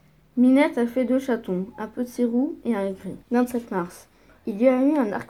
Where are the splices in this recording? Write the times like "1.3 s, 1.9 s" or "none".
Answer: 3.2 s